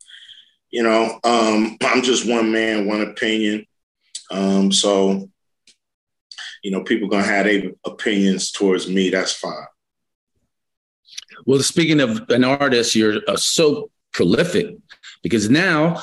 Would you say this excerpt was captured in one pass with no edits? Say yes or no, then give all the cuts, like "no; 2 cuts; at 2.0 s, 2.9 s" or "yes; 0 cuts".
yes; 0 cuts